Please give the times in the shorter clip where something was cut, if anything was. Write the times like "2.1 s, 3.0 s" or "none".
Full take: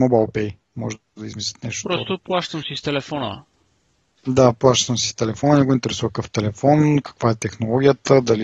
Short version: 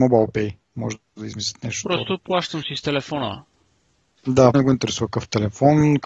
4.5 s